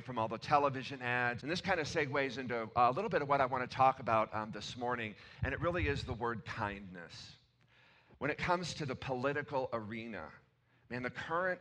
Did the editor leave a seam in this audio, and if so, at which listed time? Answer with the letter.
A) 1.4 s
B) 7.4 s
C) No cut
A